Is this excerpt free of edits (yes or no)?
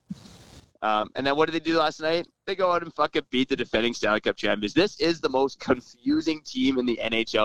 yes